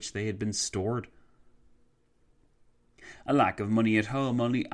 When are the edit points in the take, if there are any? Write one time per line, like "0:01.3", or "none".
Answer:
none